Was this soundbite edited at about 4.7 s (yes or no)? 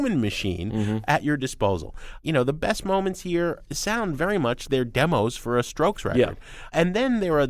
yes